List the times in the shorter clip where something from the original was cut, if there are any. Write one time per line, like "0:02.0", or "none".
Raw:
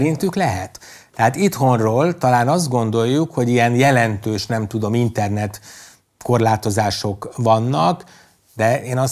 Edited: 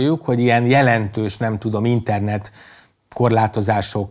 none